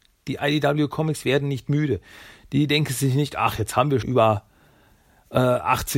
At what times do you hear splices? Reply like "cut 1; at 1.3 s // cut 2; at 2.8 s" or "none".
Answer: cut 1; at 4.0 s